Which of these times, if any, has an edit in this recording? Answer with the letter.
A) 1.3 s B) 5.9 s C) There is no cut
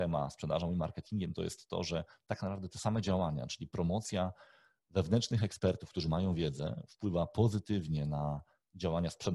C